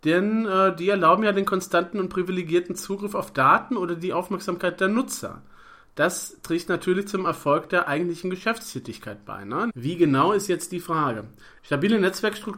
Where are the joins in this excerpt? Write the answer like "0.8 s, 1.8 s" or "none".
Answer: 9.7 s, 11.6 s